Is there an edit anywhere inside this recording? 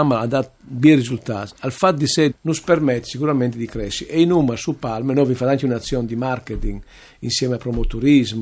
yes; 1 cut; at 2.3 s

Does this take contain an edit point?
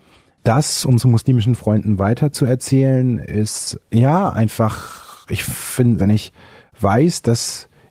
yes; 1 cut; at 6.0 s

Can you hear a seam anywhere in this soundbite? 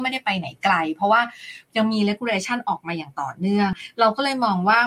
no; 0 cuts

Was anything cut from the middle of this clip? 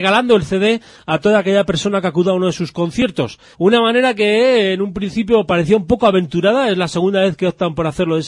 yes; 1 cut; at 3.5 s

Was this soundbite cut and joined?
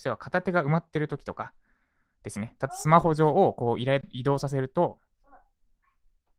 yes; 1 cut; at 2.7 s

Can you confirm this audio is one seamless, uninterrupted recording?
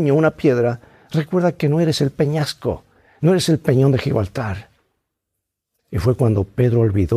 yes; 0 cuts

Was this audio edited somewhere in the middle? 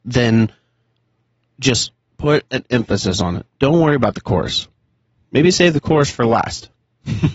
yes; 1 cut; at 3.5 s

